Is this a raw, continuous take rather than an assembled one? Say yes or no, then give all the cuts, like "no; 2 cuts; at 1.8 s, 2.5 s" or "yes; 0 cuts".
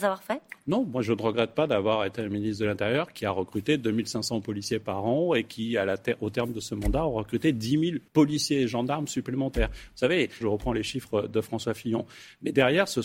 no; 2 cuts; at 8.1 s, 10.4 s